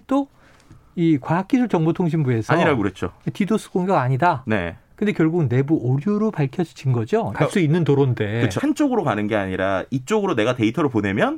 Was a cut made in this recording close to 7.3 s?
yes; 2 cuts; at 7.3 s, 8.6 s

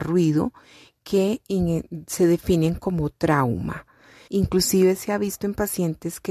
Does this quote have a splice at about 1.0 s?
no; 1 cut; at 4.3 s

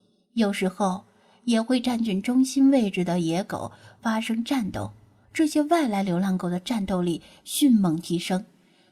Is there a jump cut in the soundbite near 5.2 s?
yes; 1 cut; at 5.2 s

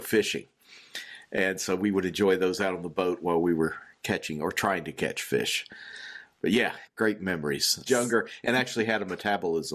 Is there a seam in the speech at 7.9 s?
yes; 1 cut; at 7.9 s

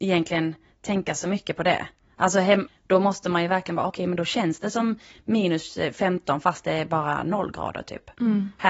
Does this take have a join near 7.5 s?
no; 2 cuts; at 2.7 s, 3.9 s

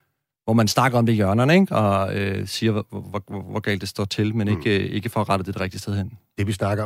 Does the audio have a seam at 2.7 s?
no; 0 cuts

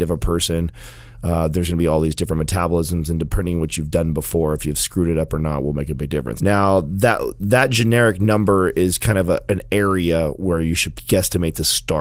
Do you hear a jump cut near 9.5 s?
yes; 3 cuts; at 6.4 s, 9.5 s, 10.9 s

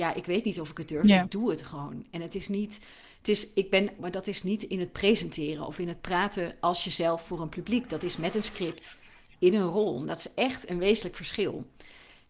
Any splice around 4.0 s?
yes; 1 cut; at 4.0 s

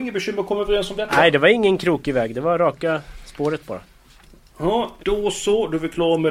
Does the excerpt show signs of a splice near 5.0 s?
yes; 1 cut; at 5.0 s

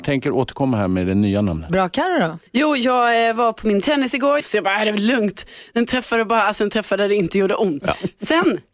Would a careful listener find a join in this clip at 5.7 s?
no; 3 cuts; at 2.5 s, 4.4 s, 7.8 s

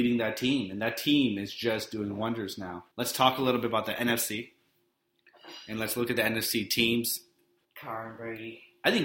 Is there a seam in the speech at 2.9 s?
yes; 2 cuts; at 2.9 s, 7.6 s

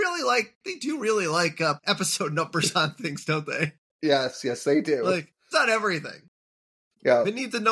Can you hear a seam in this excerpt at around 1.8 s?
yes; 2 cuts; at 1.8 s, 5.5 s

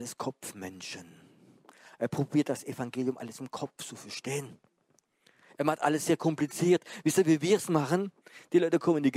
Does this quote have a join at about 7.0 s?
no; 0 cuts

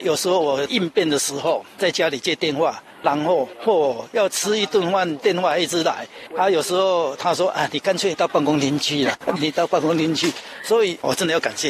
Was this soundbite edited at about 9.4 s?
yes; 1 cut; at 9.4 s

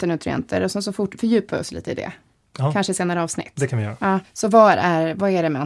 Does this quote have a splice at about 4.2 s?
yes; 1 cut; at 4.2 s

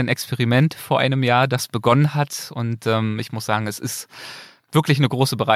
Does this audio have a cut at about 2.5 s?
no; 0 cuts

